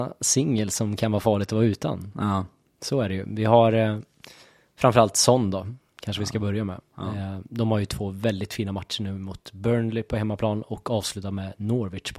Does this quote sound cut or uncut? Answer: uncut